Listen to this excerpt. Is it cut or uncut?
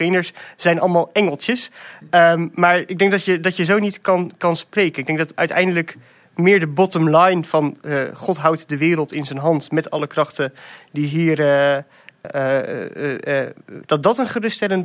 cut